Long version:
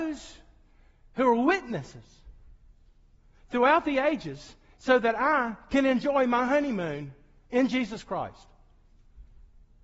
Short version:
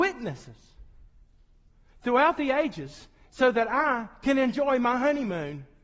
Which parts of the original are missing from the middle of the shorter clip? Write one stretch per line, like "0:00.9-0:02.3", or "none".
none